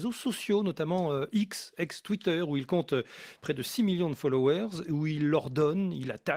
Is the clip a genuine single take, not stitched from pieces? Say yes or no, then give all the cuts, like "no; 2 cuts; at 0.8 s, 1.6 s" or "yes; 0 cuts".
yes; 0 cuts